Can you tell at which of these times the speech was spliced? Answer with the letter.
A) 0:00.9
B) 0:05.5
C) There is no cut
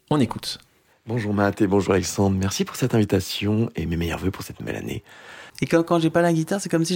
B